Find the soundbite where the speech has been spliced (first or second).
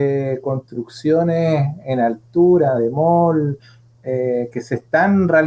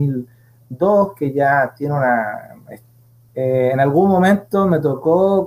second